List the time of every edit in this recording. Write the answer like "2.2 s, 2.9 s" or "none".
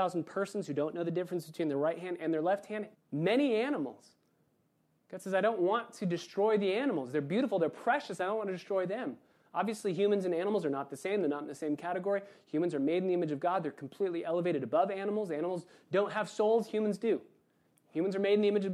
2.9 s